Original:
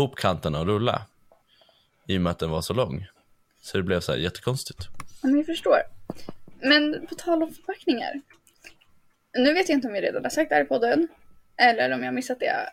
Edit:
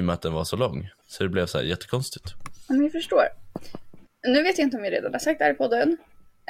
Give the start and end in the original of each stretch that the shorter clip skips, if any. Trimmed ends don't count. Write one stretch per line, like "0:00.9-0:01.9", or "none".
0:03.2-0:03.5
0:06.6-0:09.1